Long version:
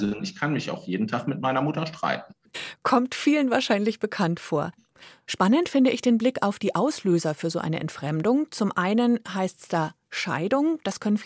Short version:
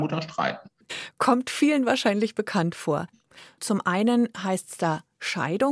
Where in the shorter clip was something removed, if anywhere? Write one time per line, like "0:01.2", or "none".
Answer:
0:03.6